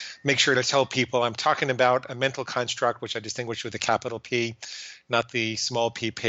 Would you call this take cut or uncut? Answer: uncut